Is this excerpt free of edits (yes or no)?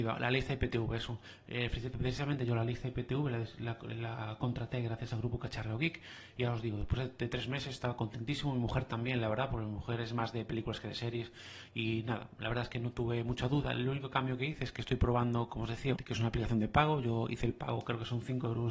no